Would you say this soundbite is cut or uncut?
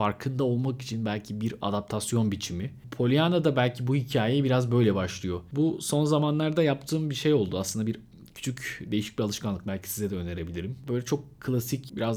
uncut